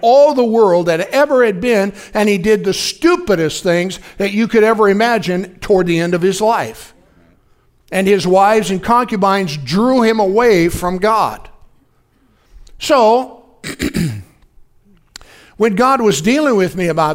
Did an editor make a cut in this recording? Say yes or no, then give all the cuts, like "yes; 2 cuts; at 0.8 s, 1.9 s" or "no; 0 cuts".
no; 0 cuts